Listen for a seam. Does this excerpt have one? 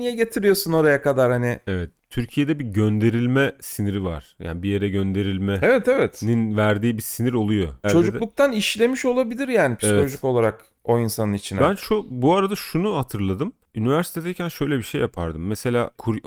yes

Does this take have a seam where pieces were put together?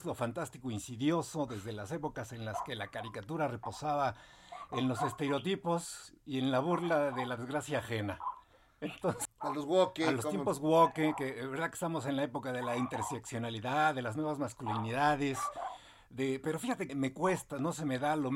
yes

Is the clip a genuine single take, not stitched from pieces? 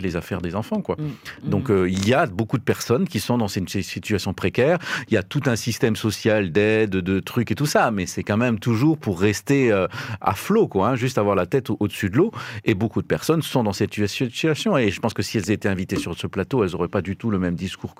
yes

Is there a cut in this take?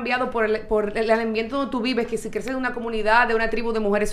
no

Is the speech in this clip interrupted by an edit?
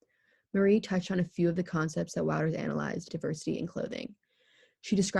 yes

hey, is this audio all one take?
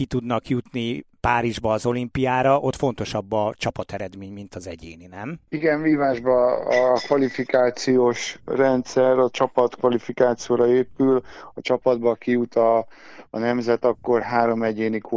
yes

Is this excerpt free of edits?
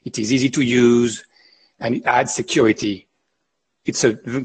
yes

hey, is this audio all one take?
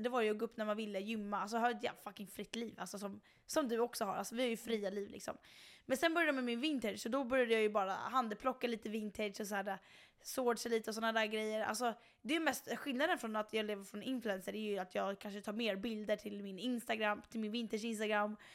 yes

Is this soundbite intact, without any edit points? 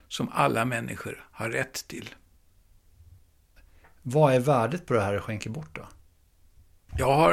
yes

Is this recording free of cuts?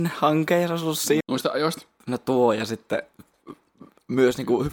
no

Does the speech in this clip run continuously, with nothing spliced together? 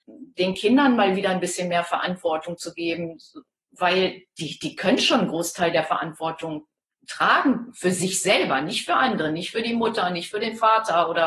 yes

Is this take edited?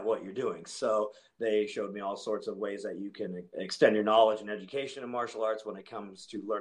yes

